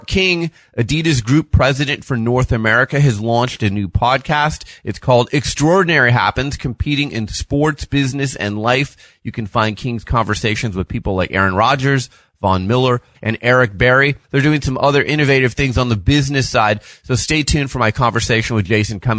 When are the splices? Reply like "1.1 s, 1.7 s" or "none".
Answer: 13.1 s, 14.2 s